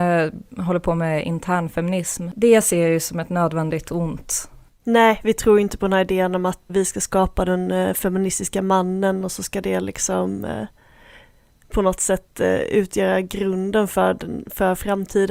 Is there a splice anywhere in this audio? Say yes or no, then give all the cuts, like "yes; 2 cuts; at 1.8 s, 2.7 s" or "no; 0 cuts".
yes; 2 cuts; at 4.7 s, 6.7 s